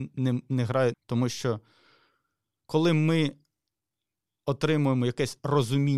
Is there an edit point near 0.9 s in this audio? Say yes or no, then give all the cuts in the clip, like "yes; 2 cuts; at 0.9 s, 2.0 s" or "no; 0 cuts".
yes; 1 cut; at 0.9 s